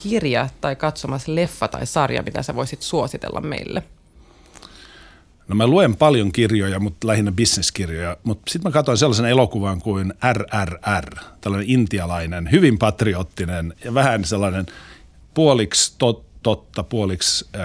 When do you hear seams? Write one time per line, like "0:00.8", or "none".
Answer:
none